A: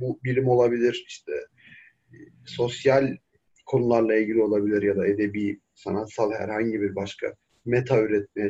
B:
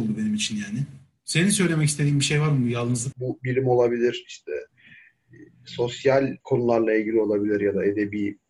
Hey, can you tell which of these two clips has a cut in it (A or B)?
B